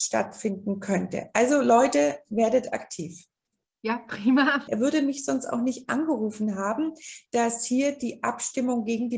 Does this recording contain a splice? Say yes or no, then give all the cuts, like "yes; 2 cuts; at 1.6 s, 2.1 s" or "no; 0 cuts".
yes; 2 cuts; at 4.7 s, 7.3 s